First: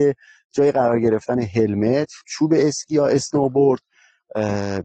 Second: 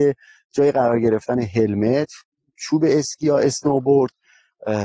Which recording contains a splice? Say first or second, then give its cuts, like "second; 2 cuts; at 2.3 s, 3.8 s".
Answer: first; 1 cut; at 2.2 s